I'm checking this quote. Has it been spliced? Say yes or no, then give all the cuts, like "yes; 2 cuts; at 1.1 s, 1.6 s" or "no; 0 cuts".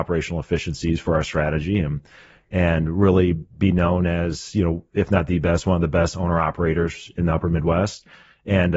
no; 0 cuts